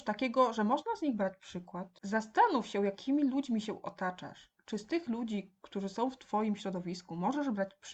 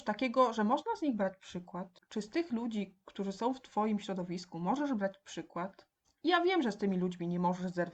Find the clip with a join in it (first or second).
second